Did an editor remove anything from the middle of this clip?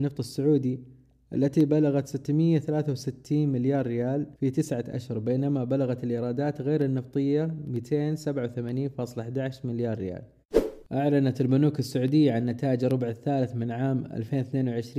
yes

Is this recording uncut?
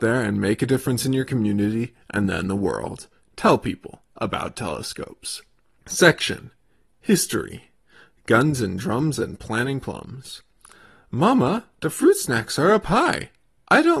no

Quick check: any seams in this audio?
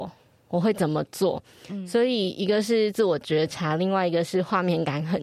no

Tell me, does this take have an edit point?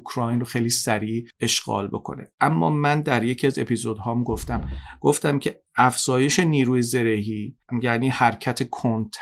no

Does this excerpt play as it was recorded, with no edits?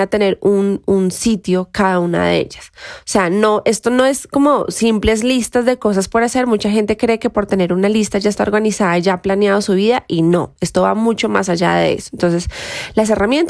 yes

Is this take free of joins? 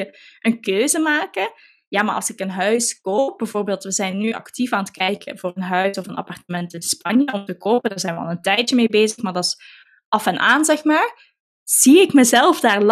yes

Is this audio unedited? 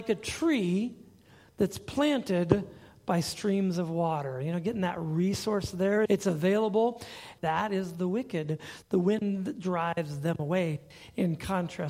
no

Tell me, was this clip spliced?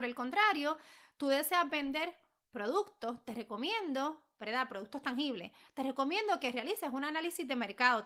no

